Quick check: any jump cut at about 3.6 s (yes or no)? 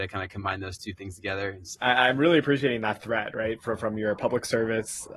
no